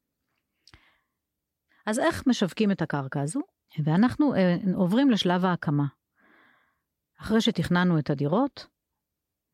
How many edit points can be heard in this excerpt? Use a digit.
1